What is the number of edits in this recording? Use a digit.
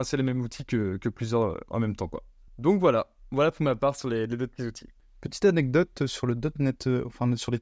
0